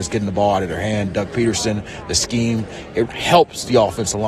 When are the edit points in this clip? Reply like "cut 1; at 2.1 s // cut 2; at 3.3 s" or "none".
cut 1; at 3.0 s